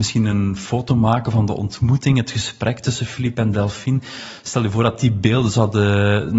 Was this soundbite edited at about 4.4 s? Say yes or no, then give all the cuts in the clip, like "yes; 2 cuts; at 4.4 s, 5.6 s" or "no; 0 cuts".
no; 0 cuts